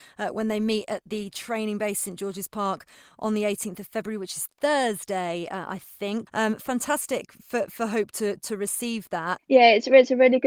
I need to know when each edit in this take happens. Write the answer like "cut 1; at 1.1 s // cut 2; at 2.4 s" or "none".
cut 1; at 6.3 s // cut 2; at 9.4 s